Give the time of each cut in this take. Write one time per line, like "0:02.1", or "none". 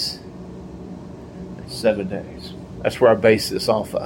0:01.6
0:02.8

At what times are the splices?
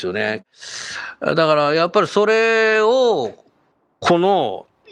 none

